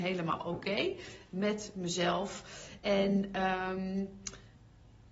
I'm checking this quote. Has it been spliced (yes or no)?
no